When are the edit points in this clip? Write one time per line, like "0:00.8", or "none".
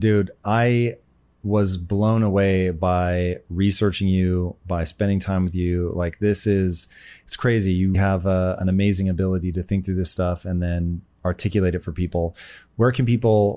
0:07.9